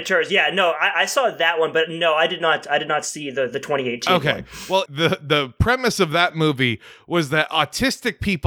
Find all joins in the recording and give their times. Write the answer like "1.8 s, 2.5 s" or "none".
4.9 s